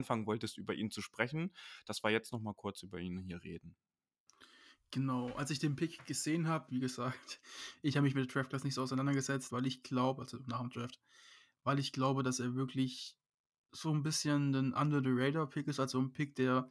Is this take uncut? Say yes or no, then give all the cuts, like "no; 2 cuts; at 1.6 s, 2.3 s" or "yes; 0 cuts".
no; 2 cuts; at 6.7 s, 9.5 s